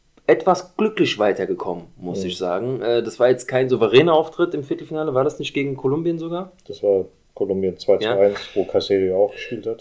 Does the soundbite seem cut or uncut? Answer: uncut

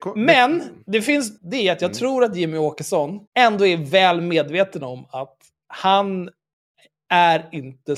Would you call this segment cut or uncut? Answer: cut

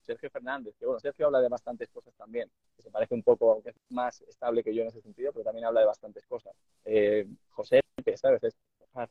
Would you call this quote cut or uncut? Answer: uncut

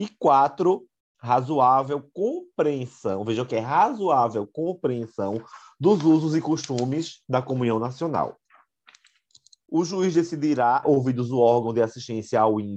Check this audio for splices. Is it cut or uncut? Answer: cut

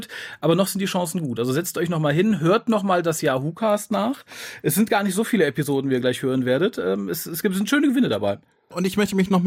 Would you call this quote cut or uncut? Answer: uncut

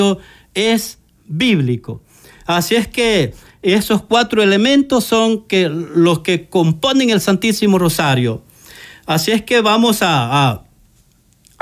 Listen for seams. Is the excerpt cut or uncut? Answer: uncut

